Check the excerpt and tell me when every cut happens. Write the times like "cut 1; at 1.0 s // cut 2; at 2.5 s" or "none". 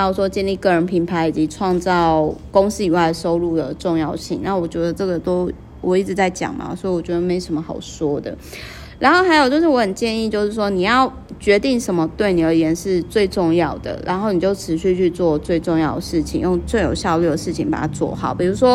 cut 1; at 16.6 s